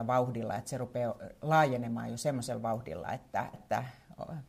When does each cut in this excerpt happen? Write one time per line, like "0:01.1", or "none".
0:03.5

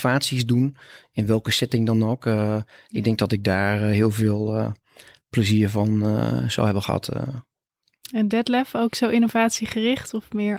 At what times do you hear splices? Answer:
none

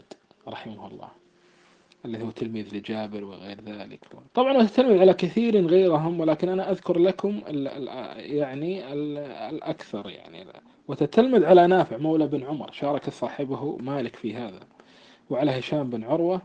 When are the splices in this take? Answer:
0:04.3

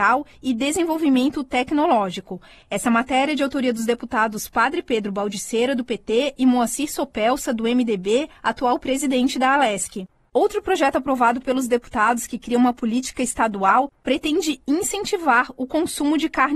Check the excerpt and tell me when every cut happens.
none

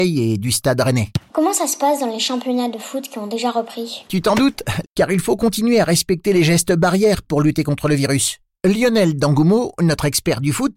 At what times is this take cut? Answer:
0:01.3
0:04.8

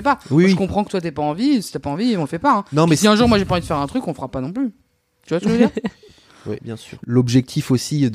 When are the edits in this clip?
0:06.6

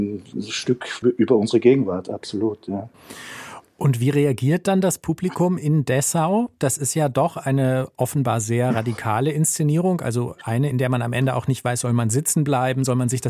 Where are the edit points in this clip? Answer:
none

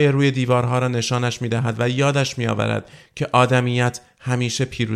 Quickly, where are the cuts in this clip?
none

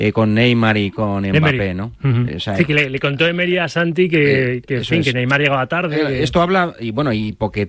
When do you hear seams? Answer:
0:02.3

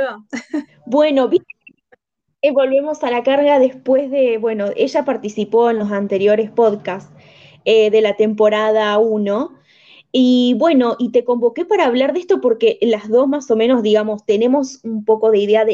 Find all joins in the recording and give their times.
none

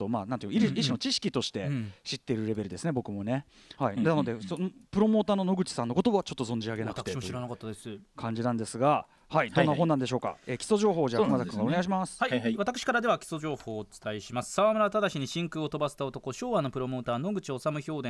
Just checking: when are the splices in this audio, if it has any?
none

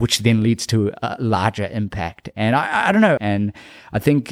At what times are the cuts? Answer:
0:03.2

